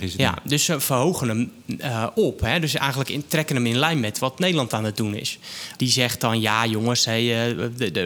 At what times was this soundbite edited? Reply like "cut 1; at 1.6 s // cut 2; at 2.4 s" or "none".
cut 1; at 5.8 s